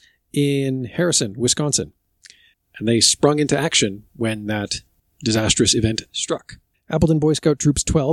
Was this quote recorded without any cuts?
no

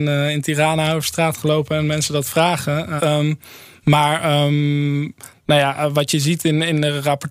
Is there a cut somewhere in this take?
yes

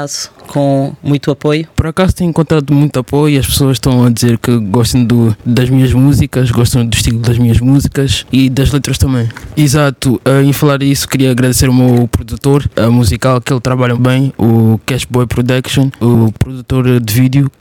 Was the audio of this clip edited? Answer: yes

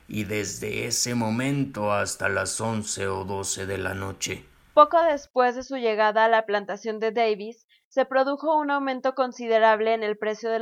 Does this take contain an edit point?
no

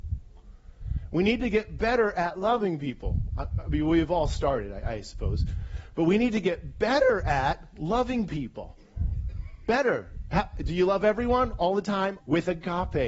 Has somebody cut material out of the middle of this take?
yes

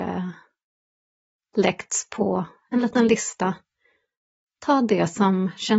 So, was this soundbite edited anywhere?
no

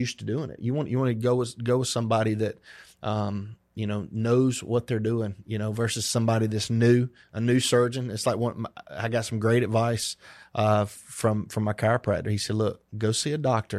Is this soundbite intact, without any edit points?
yes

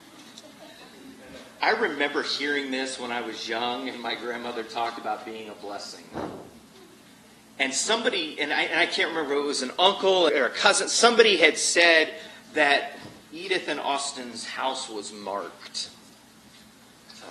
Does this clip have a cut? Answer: yes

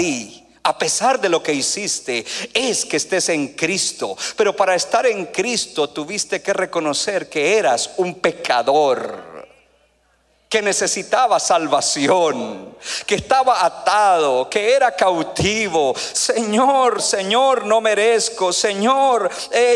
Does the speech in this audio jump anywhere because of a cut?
yes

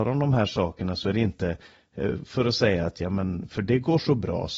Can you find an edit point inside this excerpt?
no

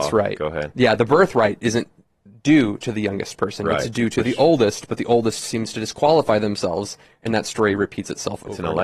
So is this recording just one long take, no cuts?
yes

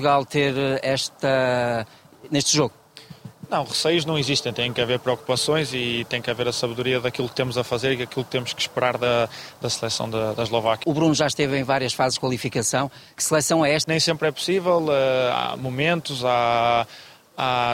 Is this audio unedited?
no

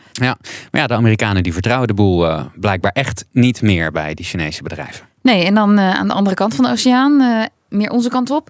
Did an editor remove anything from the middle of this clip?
no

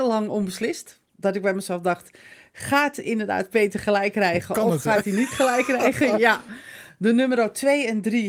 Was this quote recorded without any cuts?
yes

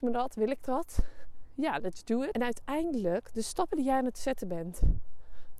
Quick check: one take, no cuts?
no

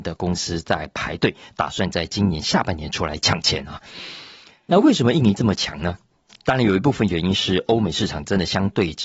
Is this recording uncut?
yes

